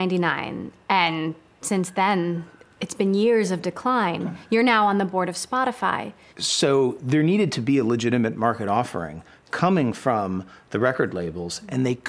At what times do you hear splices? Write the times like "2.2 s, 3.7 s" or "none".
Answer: 6.3 s